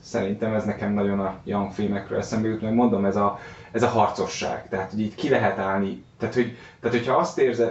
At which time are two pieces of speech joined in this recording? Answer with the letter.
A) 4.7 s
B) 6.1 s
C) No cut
C